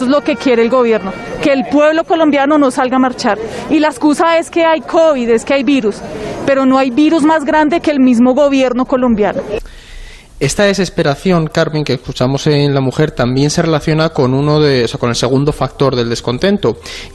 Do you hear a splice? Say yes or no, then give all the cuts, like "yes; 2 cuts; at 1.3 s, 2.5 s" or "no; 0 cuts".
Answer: no; 0 cuts